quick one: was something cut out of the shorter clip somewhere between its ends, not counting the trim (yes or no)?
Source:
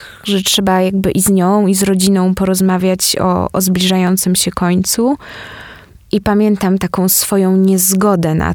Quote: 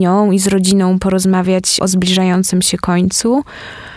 yes